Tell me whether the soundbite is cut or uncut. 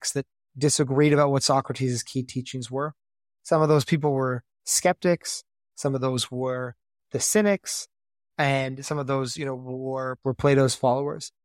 cut